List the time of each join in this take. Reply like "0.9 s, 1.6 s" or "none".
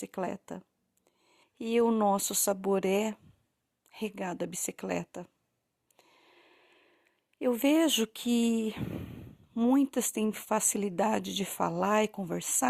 1.4 s